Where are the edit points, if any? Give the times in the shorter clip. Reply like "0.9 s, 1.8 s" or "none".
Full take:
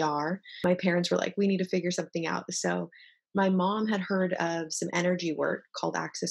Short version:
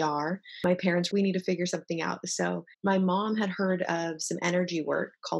1.1 s, 2.7 s